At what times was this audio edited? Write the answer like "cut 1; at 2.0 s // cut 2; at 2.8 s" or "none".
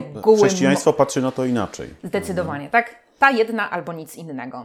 none